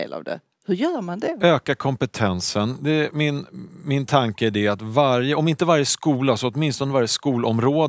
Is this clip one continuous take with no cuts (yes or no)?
yes